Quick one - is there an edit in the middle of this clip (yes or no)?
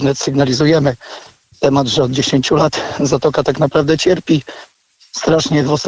no